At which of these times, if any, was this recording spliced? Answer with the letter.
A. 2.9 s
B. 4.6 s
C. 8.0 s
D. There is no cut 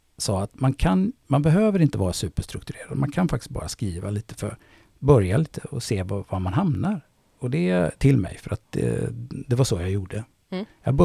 C